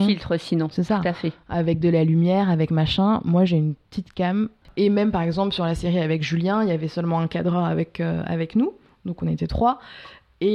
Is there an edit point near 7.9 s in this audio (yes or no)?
no